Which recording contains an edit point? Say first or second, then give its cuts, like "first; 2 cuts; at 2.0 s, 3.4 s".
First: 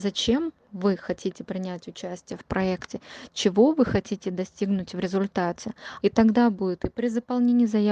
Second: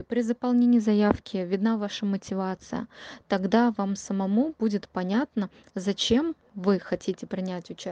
first; 1 cut; at 6.0 s